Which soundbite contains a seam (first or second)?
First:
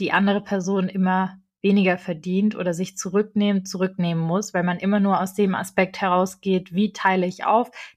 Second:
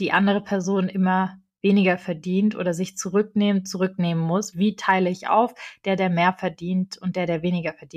second